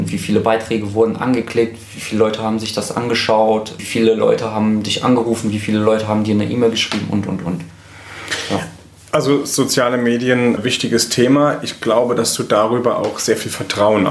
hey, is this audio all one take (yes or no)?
yes